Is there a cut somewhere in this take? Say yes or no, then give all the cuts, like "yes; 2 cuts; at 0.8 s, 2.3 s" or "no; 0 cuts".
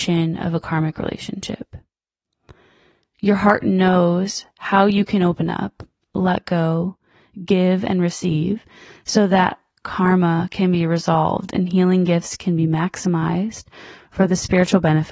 no; 0 cuts